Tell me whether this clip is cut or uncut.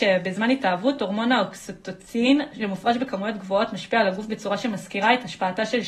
uncut